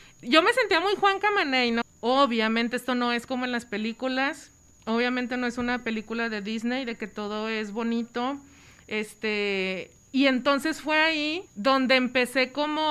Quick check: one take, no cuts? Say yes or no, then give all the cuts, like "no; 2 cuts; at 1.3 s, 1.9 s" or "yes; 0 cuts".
no; 2 cuts; at 1.8 s, 11.5 s